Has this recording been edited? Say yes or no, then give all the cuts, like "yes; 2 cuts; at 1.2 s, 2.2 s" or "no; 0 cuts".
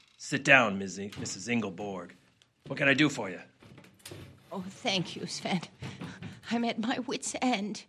no; 0 cuts